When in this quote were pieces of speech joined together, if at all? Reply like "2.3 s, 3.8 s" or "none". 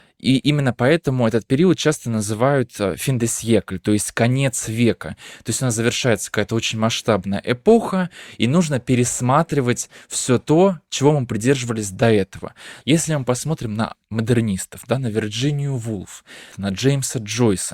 12.8 s, 14.9 s, 16.5 s